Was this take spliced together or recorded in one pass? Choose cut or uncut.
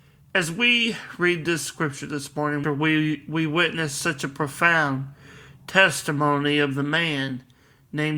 cut